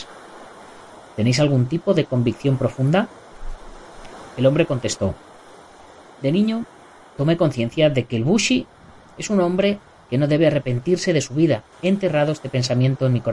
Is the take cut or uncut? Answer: cut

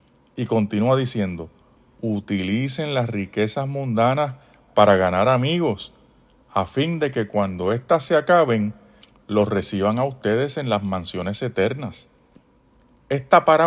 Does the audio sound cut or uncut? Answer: cut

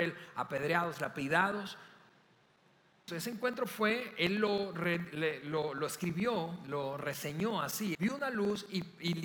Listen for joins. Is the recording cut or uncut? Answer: cut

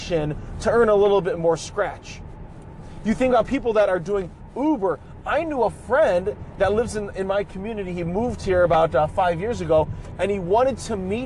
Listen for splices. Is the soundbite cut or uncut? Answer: uncut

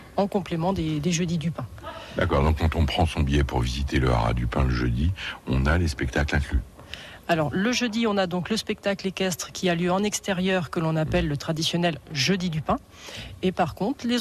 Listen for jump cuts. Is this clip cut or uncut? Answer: uncut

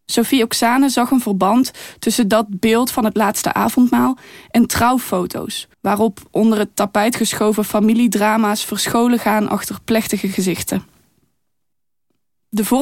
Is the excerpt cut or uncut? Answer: cut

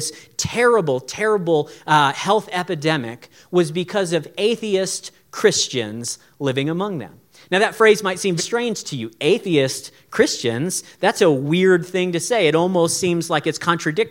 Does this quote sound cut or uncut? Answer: cut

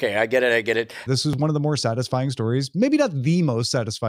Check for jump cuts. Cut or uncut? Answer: cut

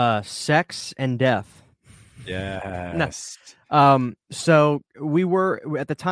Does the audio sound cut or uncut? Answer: uncut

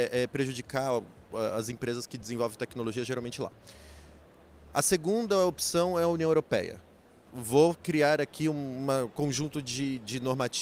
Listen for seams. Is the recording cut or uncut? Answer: uncut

